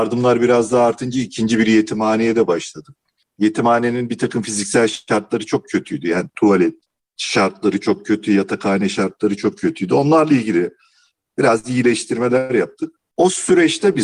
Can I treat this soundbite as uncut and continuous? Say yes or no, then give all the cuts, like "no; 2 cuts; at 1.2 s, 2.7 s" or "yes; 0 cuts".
yes; 0 cuts